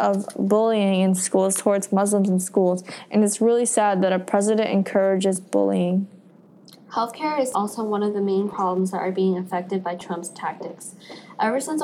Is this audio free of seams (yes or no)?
no